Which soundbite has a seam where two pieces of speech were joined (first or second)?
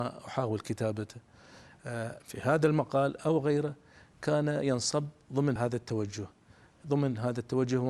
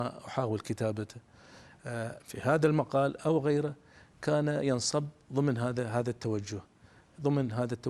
first